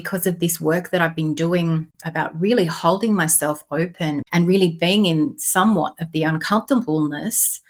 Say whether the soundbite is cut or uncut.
cut